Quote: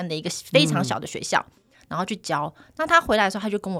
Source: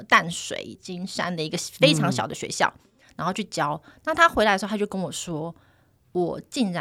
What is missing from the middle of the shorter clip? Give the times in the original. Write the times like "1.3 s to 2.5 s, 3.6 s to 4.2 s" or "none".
none